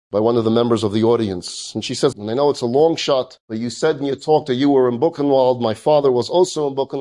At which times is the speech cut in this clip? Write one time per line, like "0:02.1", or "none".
0:02.1